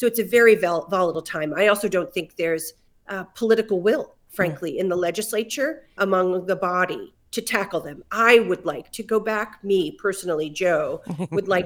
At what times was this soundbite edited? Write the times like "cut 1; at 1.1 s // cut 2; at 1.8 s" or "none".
none